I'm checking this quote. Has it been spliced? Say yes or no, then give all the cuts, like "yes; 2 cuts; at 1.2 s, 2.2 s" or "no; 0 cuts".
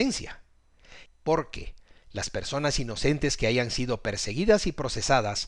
yes; 1 cut; at 1.1 s